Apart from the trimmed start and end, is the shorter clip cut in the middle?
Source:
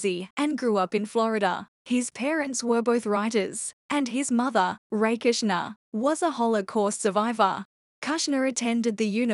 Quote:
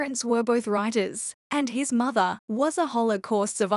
yes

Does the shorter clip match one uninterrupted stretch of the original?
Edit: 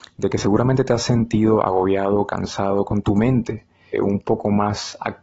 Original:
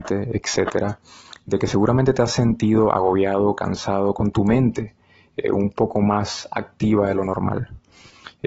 no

